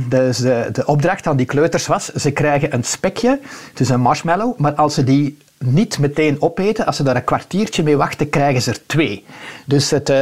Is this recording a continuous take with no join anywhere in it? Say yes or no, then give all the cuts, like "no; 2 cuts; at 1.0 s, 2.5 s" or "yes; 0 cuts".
yes; 0 cuts